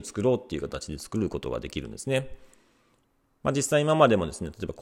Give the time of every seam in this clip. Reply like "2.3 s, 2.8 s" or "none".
none